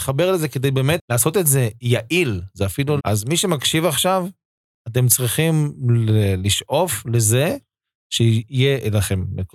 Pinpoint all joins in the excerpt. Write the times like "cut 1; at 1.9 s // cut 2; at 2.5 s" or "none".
cut 1; at 3.0 s